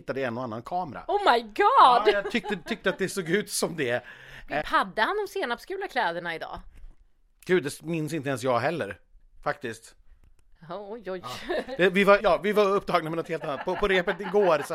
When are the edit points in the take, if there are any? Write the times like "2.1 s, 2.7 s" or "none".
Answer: 4.6 s, 12.2 s